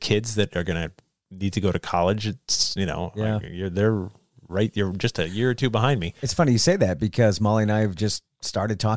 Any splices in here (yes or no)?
no